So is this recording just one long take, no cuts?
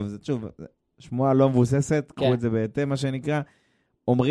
yes; 0 cuts

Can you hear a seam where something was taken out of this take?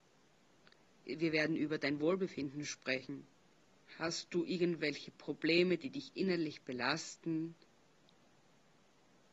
yes; 1 cut; at 3.8 s

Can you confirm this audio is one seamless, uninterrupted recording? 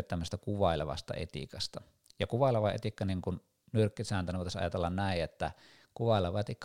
yes; 0 cuts

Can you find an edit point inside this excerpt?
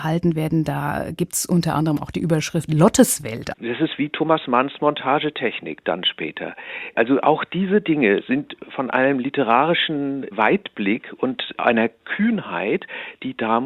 yes; 1 cut; at 3.5 s

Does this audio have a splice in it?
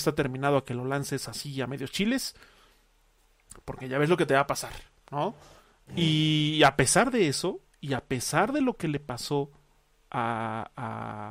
yes; 1 cut; at 5.8 s

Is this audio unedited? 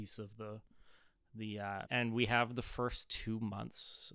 no; 1 cut; at 1.9 s

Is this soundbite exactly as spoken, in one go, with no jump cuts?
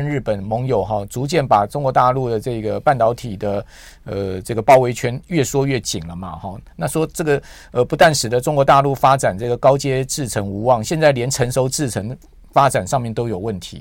yes; 0 cuts

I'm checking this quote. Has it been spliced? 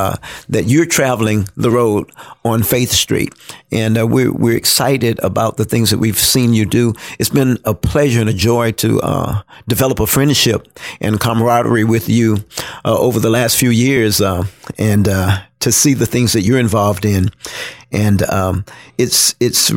no; 0 cuts

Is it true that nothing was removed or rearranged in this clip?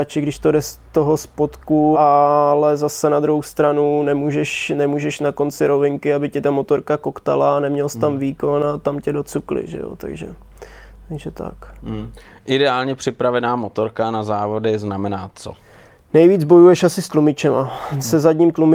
no; 1 cut; at 1.9 s

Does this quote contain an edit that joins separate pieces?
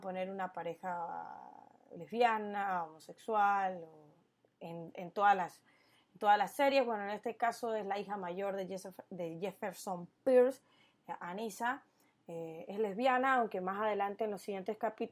no; 0 cuts

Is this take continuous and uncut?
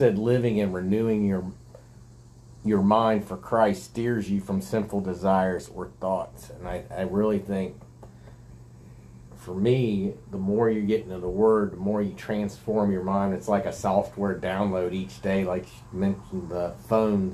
yes; 0 cuts

